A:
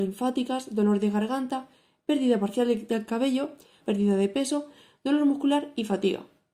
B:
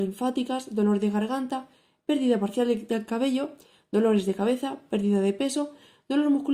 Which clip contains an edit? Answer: A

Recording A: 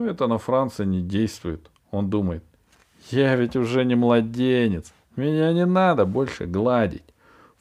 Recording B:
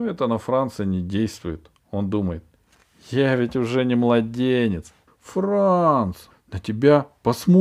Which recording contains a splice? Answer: B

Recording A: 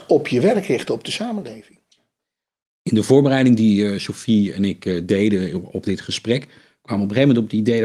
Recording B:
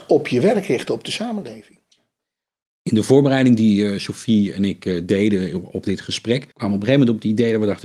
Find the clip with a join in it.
B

